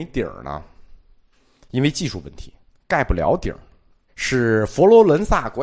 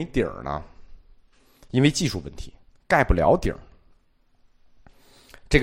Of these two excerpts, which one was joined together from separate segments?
first; 1 cut; at 4.1 s

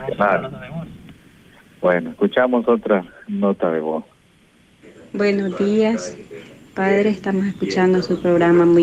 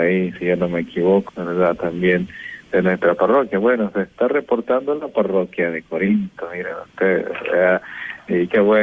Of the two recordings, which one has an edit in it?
second; 1 cut; at 1.3 s

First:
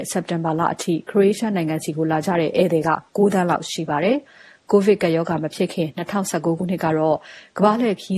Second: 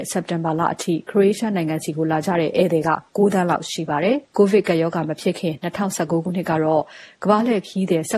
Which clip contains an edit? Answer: second; 1 cut; at 4.3 s

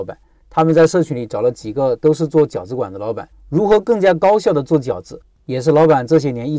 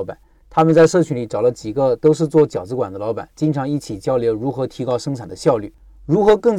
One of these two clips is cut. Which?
first; 1 cut; at 3.3 s

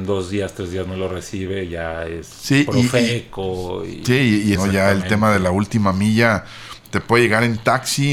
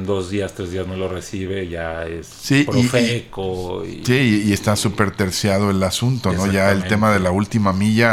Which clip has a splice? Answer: first; 1 cut; at 4.6 s

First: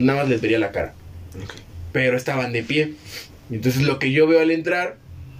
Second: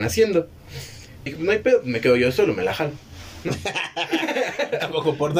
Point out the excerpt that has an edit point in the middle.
second; 1 cut; at 1.3 s

